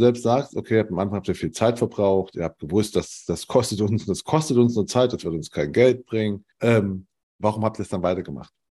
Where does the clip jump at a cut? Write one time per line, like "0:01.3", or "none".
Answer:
0:06.5